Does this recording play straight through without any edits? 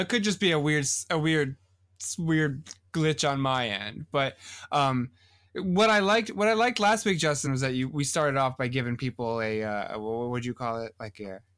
yes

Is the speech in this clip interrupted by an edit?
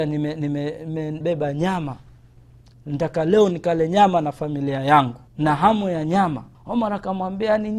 yes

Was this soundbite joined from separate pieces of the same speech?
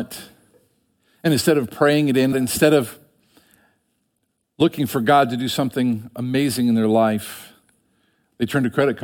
yes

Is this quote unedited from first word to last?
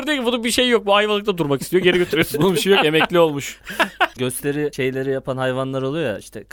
no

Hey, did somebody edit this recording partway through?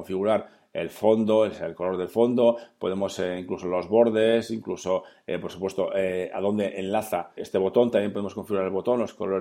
yes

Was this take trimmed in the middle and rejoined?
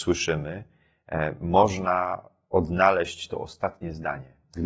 no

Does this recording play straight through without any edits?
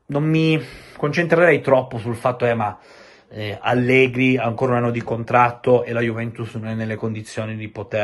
yes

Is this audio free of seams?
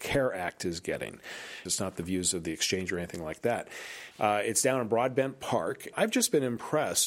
no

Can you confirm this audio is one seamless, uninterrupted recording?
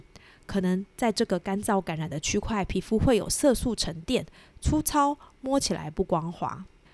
yes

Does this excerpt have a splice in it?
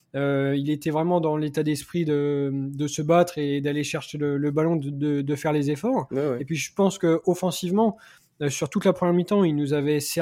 no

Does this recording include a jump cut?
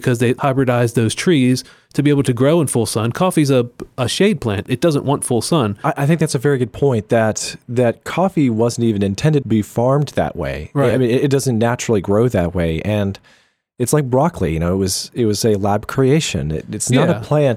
no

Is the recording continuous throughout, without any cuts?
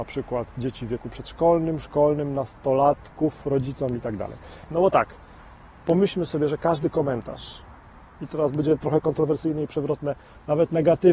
no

